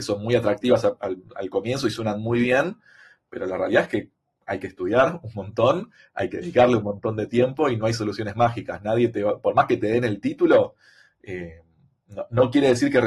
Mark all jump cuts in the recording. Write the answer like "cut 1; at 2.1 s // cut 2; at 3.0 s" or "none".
none